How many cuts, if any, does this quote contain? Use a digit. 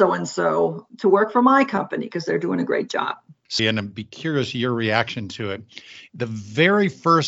2